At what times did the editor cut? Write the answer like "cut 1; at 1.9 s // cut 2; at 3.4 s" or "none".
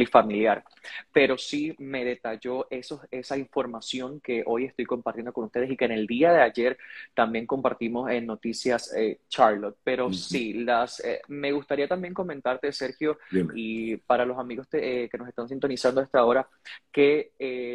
none